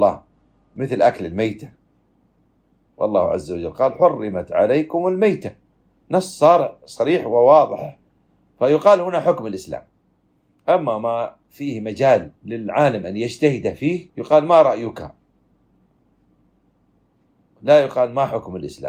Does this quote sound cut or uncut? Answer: cut